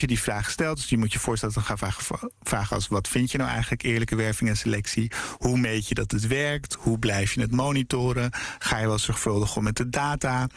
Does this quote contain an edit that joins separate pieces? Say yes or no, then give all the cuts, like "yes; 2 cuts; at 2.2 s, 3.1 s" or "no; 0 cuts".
no; 0 cuts